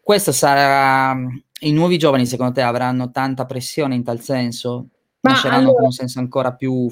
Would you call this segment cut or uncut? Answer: uncut